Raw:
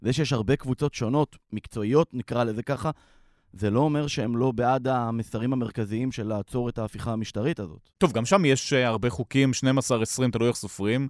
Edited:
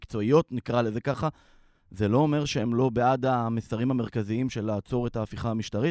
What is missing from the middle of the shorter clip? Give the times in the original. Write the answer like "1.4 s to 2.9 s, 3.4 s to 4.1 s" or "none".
none